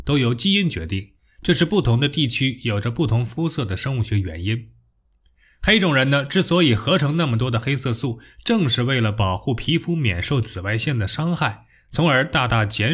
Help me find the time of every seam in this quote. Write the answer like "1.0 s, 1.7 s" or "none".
none